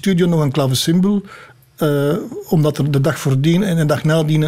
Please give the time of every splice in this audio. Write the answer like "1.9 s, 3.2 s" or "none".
none